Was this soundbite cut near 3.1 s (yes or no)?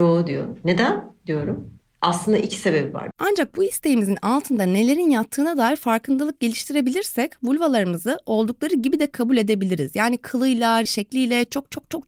yes